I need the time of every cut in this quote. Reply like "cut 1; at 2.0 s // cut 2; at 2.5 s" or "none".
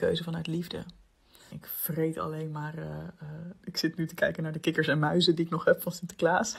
cut 1; at 1.5 s // cut 2; at 3.6 s